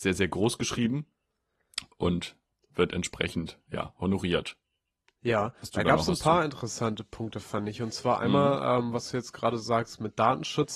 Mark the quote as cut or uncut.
uncut